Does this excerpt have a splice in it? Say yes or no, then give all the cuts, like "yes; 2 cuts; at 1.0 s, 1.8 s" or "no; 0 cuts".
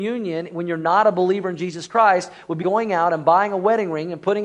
yes; 1 cut; at 2.6 s